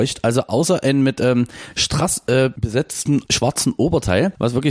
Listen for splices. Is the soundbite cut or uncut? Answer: uncut